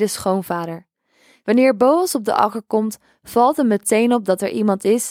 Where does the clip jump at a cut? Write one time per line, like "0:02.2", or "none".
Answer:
0:01.4